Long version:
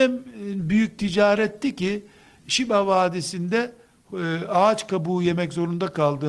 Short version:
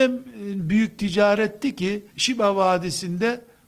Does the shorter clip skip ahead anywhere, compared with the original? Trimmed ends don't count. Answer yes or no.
yes